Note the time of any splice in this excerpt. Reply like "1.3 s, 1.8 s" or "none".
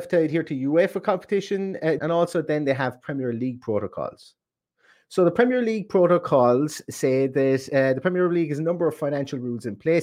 2.0 s